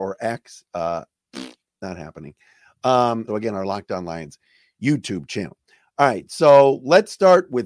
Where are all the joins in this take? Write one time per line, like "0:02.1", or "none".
0:03.3